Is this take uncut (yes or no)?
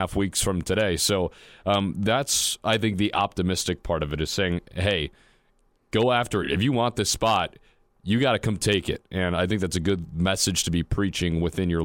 yes